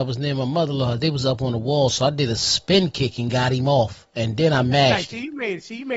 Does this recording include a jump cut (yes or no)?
no